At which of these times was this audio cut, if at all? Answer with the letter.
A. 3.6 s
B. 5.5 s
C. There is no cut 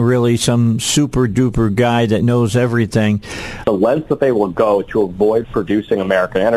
A